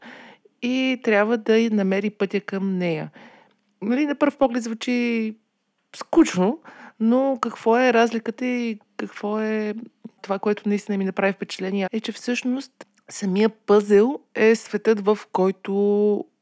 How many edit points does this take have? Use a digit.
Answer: 1